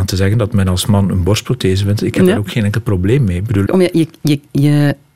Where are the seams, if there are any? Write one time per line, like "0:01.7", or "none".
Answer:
0:03.7